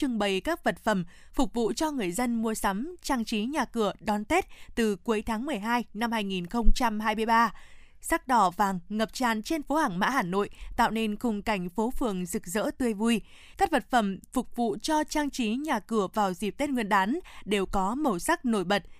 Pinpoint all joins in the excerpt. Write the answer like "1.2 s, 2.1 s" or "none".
13.5 s